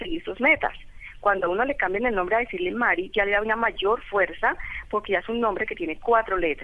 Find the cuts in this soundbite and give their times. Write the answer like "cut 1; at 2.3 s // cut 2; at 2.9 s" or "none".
none